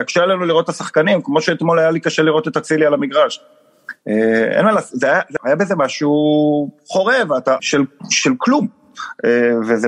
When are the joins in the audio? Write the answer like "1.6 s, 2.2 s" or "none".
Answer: 5.4 s, 7.6 s

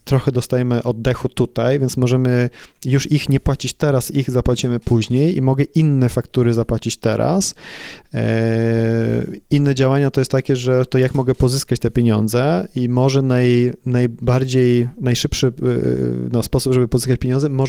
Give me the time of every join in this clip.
none

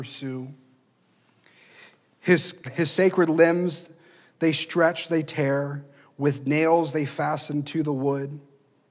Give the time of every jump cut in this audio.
2.6 s

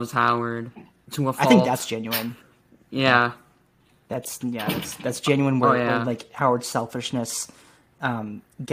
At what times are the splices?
1.0 s

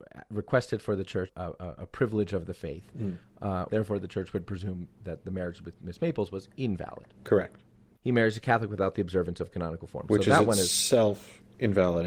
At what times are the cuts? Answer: 1.3 s, 3.7 s, 8.0 s

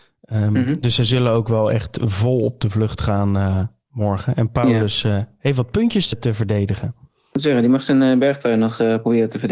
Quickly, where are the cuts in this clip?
6.1 s

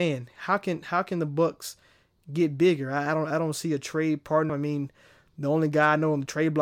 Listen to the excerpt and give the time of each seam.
4.5 s

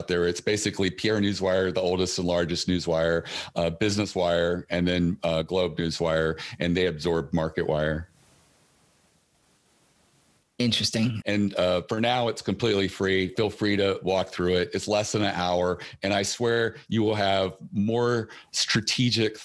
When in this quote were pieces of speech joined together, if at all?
11.2 s, 13.4 s

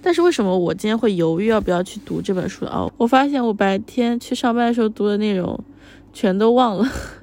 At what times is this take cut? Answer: 2.9 s

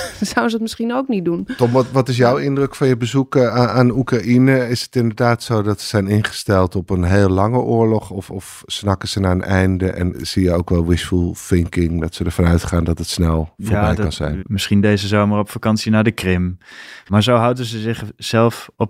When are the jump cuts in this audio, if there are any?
10.1 s, 14.4 s, 17.1 s

